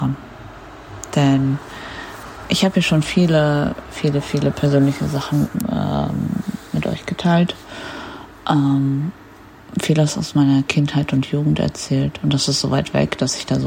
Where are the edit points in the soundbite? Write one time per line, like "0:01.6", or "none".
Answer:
none